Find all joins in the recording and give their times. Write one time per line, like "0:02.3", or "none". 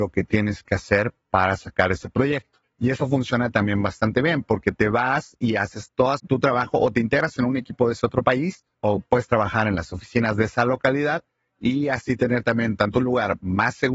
0:02.6
0:06.2